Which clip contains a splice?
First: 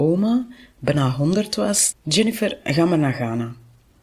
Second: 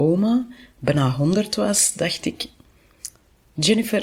first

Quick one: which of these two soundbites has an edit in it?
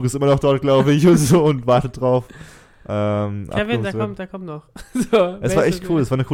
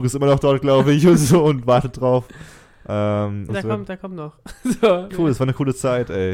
second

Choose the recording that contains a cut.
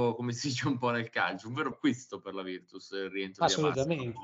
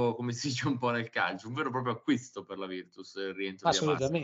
first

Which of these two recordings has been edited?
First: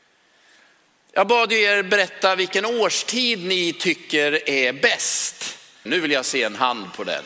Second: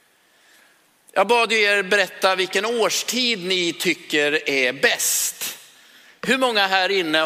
first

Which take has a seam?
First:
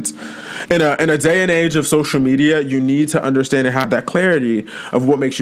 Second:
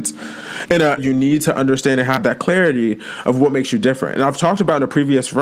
second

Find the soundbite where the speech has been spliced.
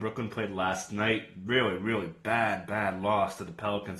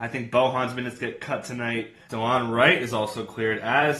second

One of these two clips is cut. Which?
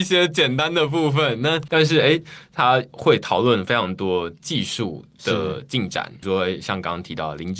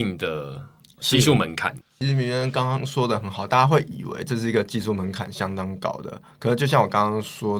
second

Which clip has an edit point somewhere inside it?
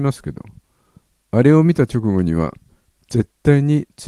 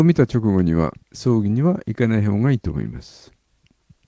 second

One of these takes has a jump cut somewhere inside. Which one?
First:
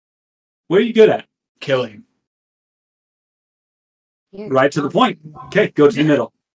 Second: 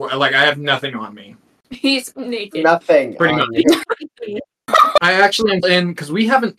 second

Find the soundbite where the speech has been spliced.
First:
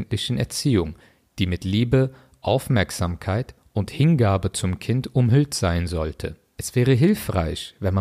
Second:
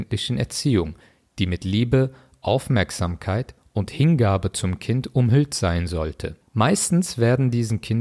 second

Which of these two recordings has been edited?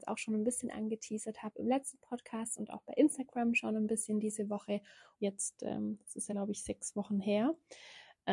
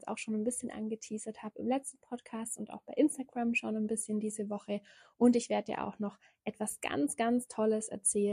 first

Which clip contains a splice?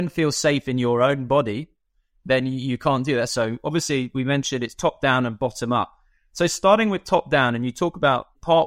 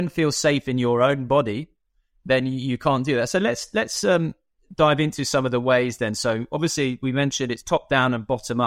first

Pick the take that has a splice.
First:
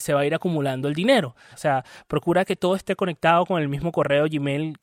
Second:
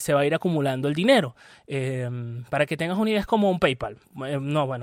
first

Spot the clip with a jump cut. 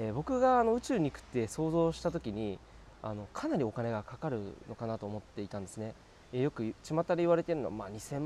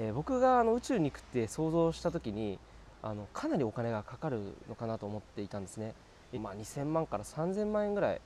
second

